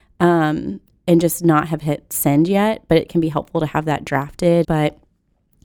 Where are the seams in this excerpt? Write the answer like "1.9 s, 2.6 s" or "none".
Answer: 4.6 s

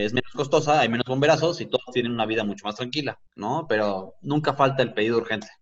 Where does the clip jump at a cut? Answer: 3.3 s

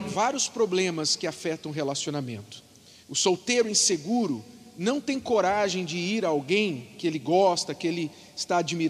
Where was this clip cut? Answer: 3.0 s

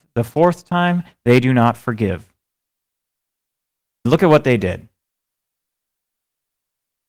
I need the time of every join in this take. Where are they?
4.1 s

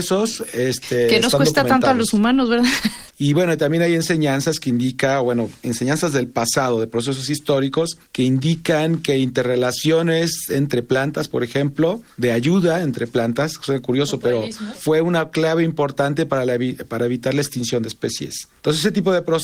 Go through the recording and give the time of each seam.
3.1 s, 14.7 s

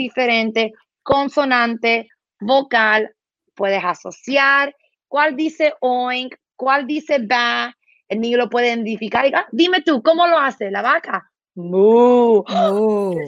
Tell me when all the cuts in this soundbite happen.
4.9 s

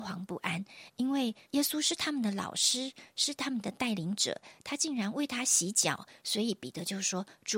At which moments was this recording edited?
1.4 s

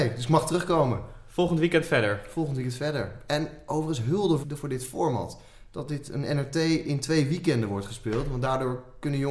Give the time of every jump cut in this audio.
4.4 s

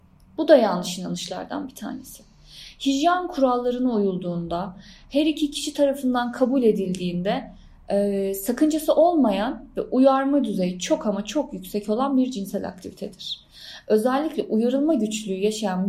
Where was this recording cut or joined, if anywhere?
none

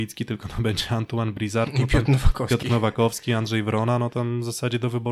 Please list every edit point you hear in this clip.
none

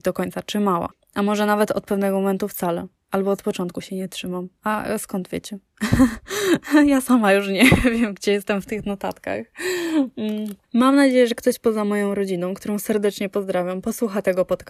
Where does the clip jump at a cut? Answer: 10.6 s

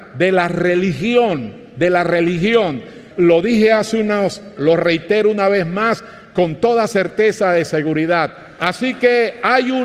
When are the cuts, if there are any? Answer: 3.1 s, 4.6 s, 8.6 s

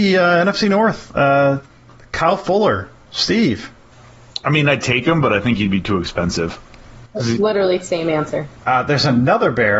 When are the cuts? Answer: 7.1 s, 8.6 s

